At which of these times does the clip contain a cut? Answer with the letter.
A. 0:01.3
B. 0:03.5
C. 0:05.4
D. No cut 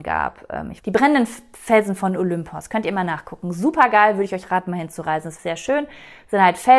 C